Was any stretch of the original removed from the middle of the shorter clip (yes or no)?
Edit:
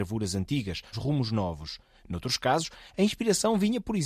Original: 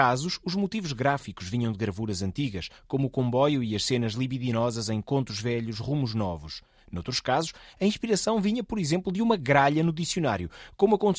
yes